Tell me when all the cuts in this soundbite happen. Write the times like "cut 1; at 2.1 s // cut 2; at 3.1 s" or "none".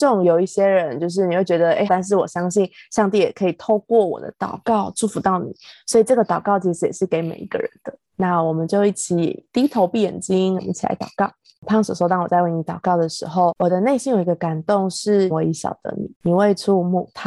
cut 1; at 1.9 s // cut 2; at 10.6 s // cut 3; at 15.3 s